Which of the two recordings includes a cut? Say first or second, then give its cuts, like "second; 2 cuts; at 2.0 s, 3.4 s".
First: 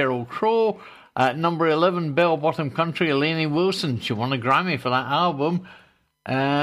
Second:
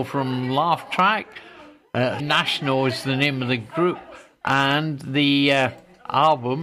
second; 1 cut; at 2.2 s